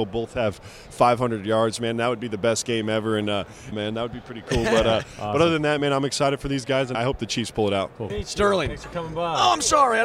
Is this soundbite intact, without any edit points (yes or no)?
no